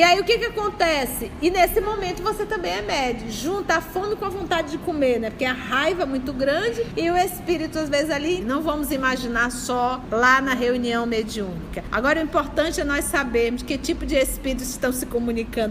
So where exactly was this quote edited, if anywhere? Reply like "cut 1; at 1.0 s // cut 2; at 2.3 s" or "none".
cut 1; at 8.4 s